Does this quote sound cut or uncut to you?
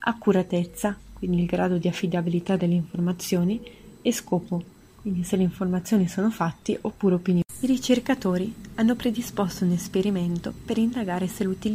uncut